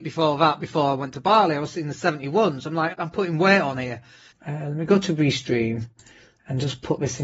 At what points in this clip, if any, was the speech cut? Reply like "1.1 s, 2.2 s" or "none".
2.9 s, 4.3 s